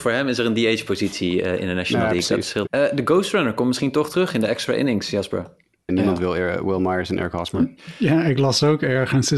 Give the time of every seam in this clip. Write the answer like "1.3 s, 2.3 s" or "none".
2.7 s, 5.9 s